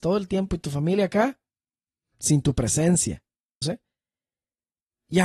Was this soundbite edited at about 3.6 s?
yes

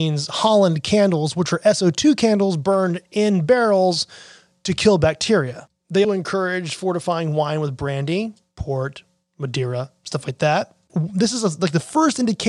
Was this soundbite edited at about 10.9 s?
yes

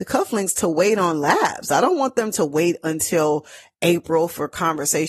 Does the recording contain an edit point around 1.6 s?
no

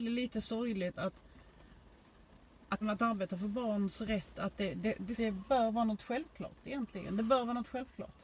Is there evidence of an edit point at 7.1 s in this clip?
no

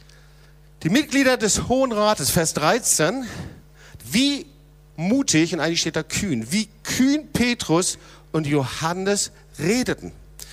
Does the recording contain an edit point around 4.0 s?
yes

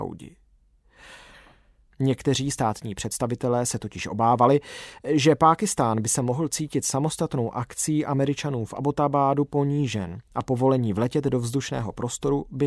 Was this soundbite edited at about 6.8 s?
no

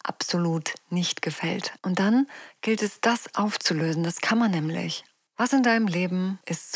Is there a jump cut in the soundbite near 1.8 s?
yes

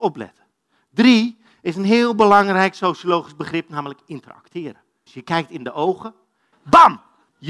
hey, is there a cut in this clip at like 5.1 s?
yes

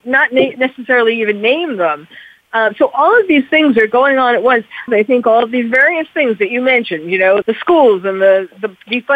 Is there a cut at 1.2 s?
no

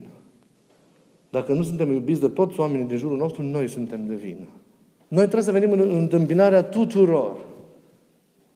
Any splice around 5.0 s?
yes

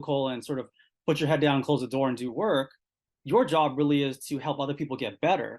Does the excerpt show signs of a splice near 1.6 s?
no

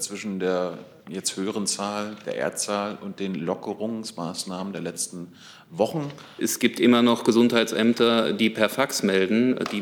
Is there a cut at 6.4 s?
yes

